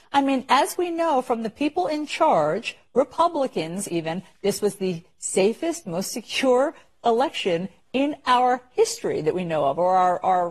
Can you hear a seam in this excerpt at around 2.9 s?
no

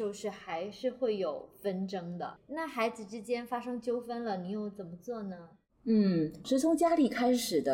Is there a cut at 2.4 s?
yes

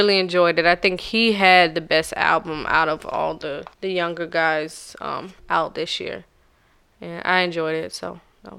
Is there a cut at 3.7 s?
yes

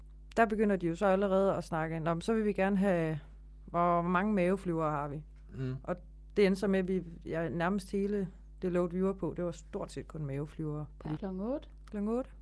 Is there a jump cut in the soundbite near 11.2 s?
yes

